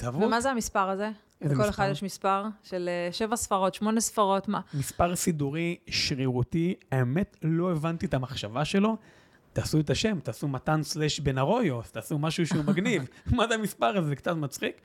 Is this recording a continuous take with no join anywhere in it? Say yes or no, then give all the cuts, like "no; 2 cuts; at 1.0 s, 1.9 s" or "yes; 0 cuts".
yes; 0 cuts